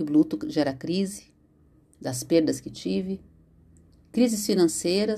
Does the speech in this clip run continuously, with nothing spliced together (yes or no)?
yes